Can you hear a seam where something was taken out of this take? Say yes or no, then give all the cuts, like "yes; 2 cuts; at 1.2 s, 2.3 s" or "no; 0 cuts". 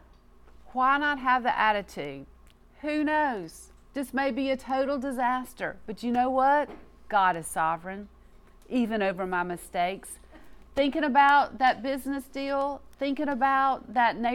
no; 0 cuts